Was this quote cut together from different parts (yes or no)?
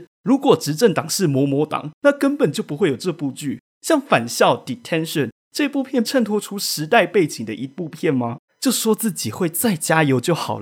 yes